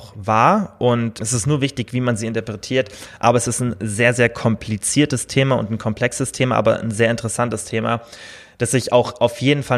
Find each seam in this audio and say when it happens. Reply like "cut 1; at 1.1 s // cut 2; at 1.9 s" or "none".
cut 1; at 1.2 s